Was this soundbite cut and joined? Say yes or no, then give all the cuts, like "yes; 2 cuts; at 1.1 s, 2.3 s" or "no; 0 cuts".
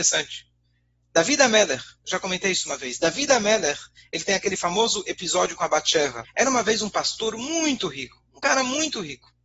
yes; 1 cut; at 6.2 s